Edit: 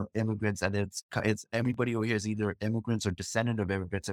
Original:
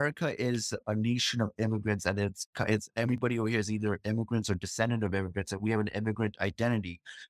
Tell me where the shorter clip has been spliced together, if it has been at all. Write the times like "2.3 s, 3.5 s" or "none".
none